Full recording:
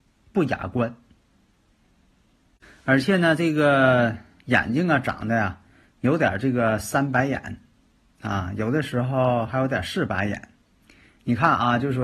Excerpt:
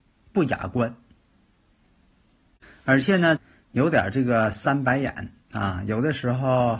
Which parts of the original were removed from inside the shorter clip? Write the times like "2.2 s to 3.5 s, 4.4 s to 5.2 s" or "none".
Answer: 3.4 s to 5.6 s, 7.7 s to 8.1 s